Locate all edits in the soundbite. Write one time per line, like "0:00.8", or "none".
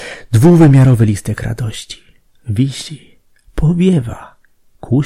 none